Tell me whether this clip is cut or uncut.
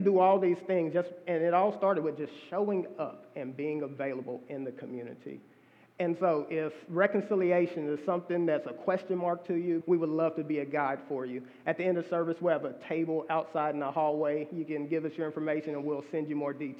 cut